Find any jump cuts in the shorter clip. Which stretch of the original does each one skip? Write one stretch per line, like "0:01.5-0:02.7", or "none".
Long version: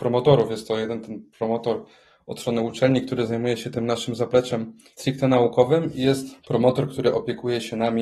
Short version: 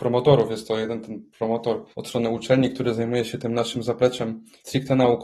0:01.9-0:02.2